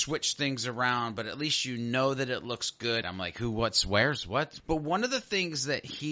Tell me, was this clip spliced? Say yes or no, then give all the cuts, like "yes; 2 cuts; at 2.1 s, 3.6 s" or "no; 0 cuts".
yes; 2 cuts; at 3.0 s, 4.6 s